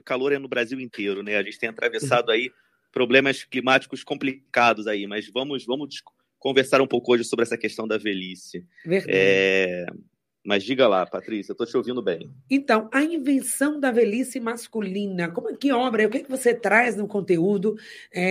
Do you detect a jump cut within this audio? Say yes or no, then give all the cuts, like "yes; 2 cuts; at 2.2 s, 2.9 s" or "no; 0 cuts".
no; 0 cuts